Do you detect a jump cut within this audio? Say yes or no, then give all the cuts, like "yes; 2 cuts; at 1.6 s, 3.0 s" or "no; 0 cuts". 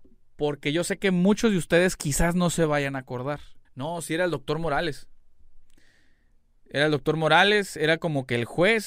yes; 1 cut; at 3.6 s